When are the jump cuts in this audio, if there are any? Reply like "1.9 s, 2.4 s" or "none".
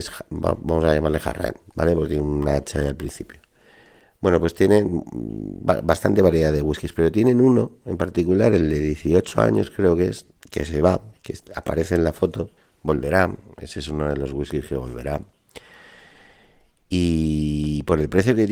none